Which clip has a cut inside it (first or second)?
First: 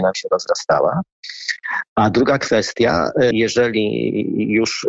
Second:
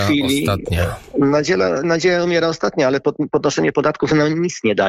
first